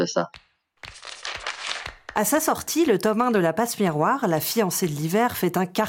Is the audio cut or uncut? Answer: uncut